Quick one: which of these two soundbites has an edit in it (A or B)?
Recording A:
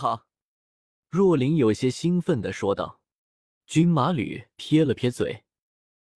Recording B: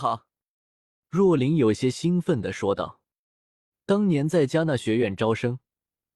A